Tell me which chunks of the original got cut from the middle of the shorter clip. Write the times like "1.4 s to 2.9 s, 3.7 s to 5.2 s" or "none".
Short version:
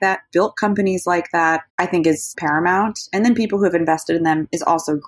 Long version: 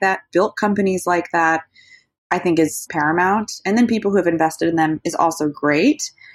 1.7 s to 2.2 s